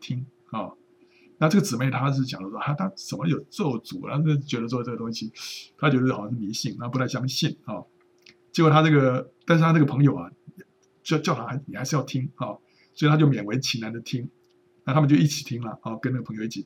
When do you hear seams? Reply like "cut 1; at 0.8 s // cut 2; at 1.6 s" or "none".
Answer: none